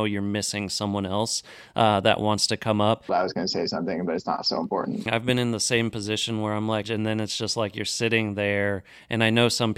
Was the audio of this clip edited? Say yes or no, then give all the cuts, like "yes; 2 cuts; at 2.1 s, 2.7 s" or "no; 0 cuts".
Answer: yes; 3 cuts; at 3.1 s, 5.1 s, 6.8 s